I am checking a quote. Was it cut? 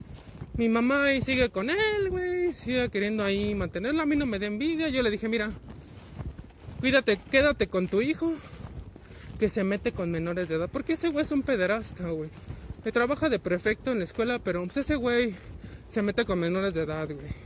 no; 0 cuts

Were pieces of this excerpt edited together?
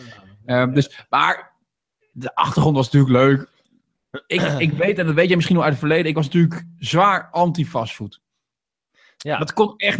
no; 0 cuts

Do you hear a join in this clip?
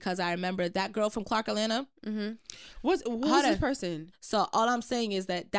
yes; 1 cut; at 4.1 s

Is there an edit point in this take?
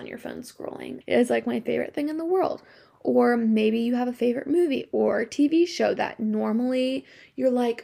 yes; 1 cut; at 1.0 s

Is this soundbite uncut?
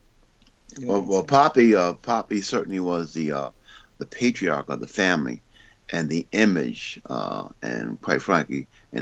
yes; 0 cuts

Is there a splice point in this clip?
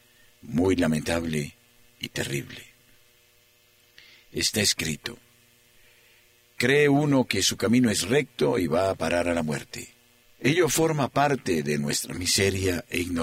yes; 1 cut; at 10.2 s

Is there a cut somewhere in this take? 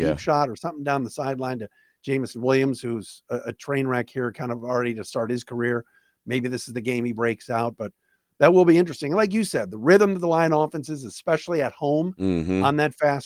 no; 0 cuts

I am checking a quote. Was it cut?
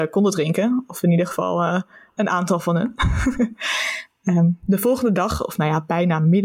no; 0 cuts

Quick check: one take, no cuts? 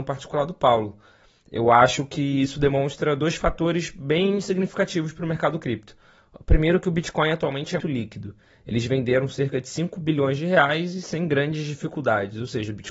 no; 1 cut; at 7.8 s

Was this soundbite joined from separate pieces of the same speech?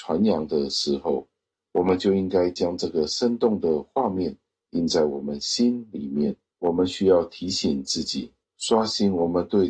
no; 0 cuts

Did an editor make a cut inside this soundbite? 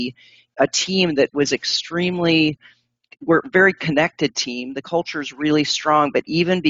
no; 0 cuts

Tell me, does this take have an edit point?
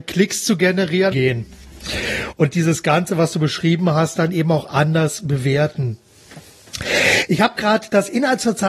yes; 1 cut; at 1.1 s

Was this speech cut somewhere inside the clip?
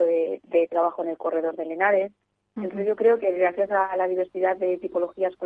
yes; 1 cut; at 2.6 s

